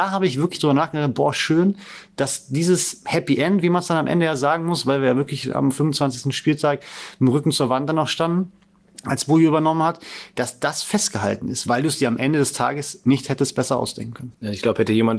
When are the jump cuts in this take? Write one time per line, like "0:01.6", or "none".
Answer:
none